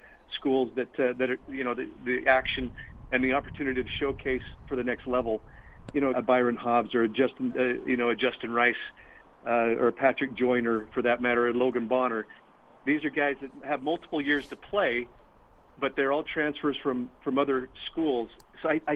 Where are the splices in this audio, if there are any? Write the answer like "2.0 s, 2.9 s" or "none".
1.4 s, 6.1 s